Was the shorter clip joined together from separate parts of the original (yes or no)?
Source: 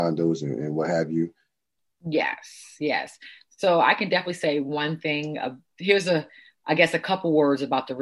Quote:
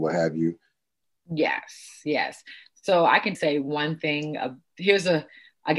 yes